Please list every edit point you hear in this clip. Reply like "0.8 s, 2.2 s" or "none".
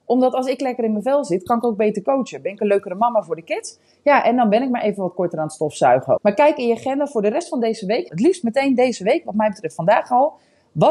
6.2 s, 8.1 s